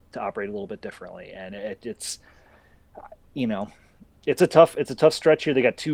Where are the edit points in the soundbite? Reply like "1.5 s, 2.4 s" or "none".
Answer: none